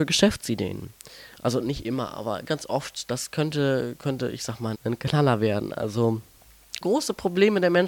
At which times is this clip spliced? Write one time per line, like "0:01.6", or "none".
0:02.5
0:04.7
0:06.8